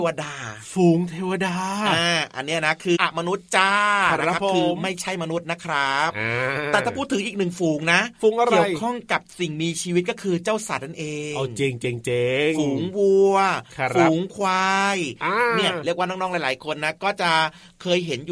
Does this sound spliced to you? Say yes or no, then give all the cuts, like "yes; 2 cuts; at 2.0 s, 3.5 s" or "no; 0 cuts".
yes; 1 cut; at 3.0 s